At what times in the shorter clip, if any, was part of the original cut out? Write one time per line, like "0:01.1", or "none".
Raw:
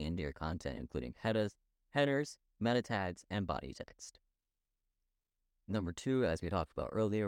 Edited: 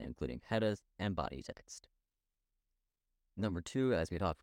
0:00.9

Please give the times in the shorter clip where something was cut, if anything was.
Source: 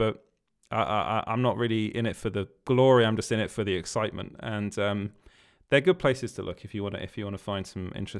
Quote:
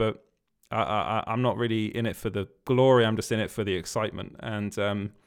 none

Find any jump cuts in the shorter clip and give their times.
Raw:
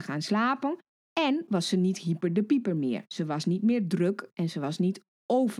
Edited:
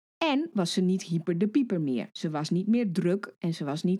none

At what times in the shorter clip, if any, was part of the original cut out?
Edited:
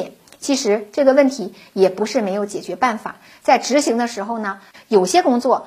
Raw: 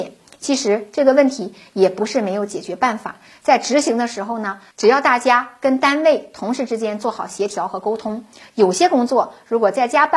0:04.7

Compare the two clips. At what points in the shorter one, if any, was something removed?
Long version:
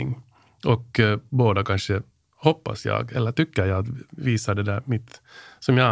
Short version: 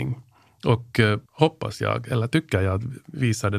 0:01.3

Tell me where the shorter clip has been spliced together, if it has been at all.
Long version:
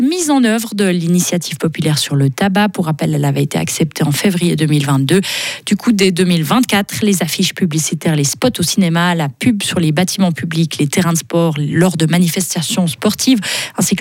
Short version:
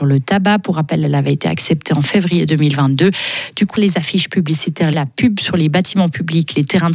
0:03.7
0:04.9

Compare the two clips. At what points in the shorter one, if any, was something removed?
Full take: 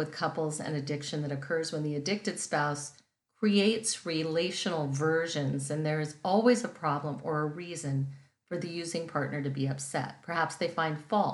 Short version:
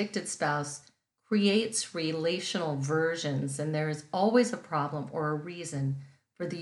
none

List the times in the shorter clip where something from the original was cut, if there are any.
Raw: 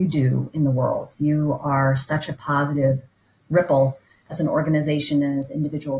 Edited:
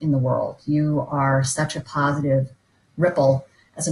none

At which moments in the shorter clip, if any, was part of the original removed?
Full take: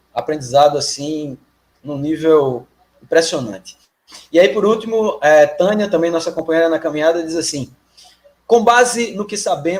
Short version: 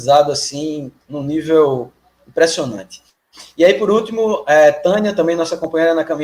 0:01.0

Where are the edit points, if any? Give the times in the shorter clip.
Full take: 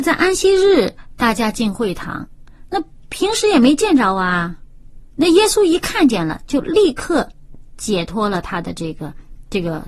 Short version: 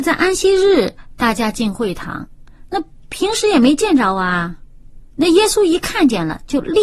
none

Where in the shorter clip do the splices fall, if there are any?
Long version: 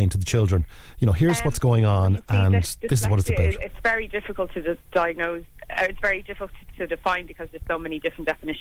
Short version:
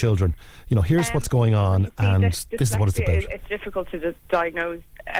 0:03.5

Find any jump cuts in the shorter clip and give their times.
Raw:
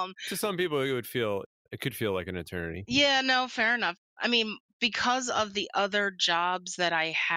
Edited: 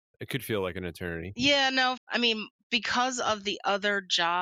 0:02.0

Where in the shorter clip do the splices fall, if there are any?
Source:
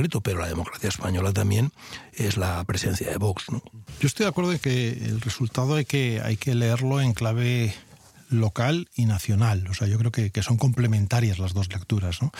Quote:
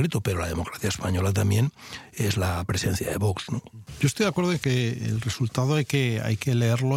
none

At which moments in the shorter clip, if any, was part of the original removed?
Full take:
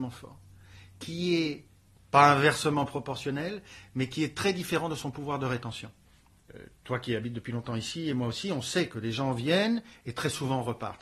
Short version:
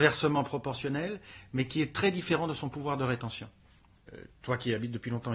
none

